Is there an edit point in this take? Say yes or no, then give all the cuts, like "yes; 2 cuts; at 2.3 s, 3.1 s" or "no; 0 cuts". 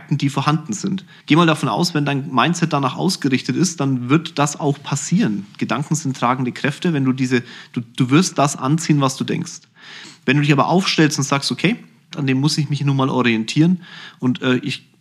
yes; 2 cuts; at 1.2 s, 12.1 s